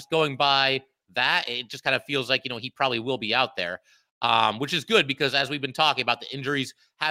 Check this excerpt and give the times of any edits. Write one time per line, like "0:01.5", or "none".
none